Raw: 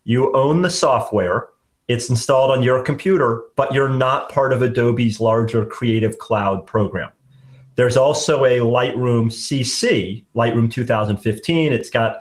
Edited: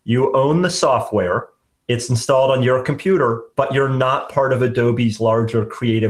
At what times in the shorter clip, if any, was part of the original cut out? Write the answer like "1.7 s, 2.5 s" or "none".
none